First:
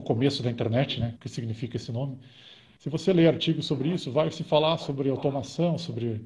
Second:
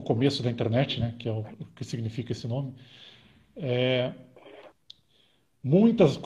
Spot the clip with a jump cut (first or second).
first